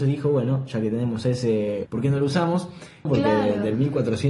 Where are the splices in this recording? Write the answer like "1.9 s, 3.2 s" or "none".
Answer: 1.8 s, 3.1 s